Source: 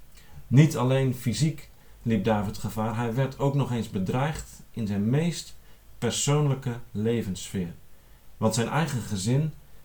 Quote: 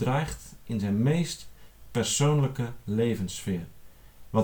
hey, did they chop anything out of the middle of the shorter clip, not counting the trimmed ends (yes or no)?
no